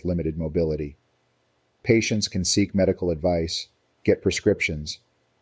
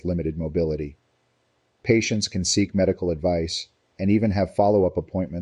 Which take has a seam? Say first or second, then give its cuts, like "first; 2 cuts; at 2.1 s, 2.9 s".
second; 1 cut; at 3.9 s